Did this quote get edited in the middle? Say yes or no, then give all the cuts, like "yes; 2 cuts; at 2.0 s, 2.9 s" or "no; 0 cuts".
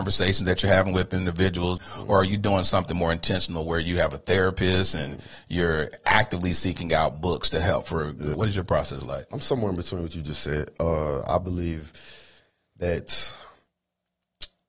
yes; 2 cuts; at 1.8 s, 8.3 s